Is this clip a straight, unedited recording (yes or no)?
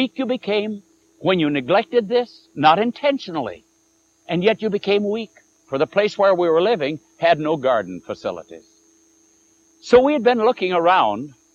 no